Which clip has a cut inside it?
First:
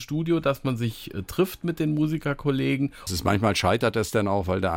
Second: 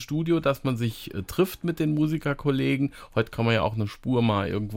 first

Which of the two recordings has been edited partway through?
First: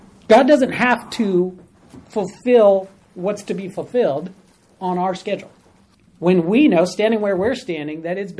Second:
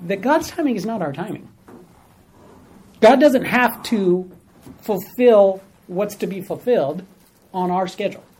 first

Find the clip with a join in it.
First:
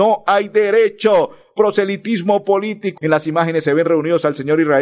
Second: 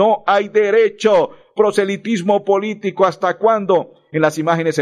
first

